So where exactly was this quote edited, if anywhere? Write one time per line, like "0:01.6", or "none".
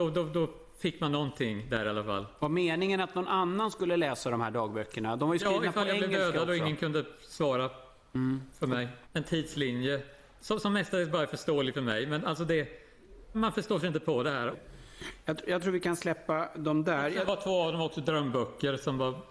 0:09.0
0:13.3
0:14.5